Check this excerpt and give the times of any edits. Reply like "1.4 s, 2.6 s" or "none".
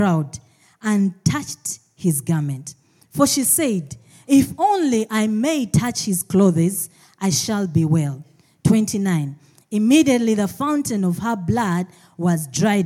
none